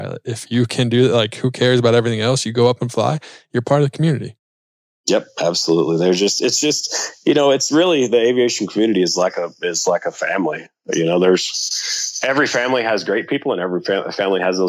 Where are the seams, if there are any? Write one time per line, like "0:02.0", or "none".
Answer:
none